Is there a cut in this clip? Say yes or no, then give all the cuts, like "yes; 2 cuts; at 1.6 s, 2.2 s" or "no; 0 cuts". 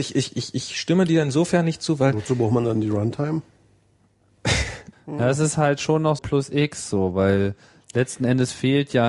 yes; 2 cuts; at 4.9 s, 6.2 s